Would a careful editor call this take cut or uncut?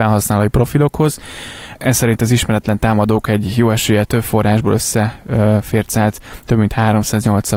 cut